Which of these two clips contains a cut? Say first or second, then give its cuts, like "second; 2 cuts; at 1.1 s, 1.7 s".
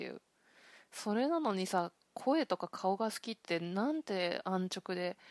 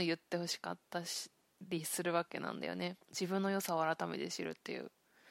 second; 1 cut; at 3.0 s